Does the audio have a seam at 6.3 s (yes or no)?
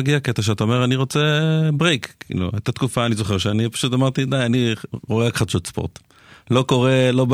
no